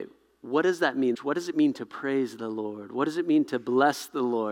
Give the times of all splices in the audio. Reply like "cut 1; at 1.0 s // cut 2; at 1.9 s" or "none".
cut 1; at 1.1 s